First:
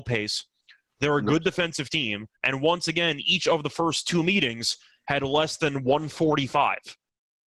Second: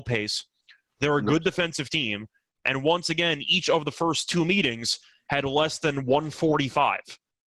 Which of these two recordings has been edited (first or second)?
first